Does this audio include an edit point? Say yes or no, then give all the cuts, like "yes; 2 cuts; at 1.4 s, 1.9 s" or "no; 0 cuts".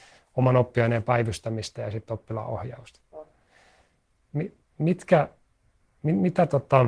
no; 0 cuts